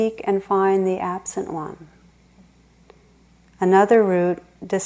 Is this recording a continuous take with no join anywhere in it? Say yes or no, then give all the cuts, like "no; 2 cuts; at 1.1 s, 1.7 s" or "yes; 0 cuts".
yes; 0 cuts